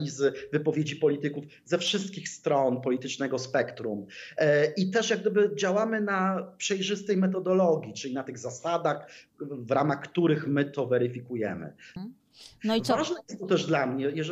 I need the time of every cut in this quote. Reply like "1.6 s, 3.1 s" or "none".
12.0 s